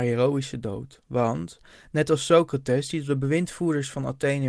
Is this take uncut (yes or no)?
yes